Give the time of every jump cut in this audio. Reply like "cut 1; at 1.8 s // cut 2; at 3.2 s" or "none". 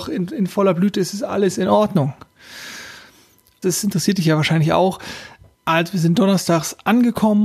cut 1; at 3.6 s // cut 2; at 5.5 s